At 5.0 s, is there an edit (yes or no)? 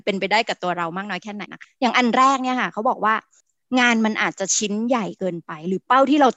no